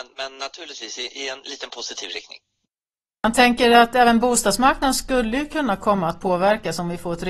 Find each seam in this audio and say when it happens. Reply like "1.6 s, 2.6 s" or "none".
none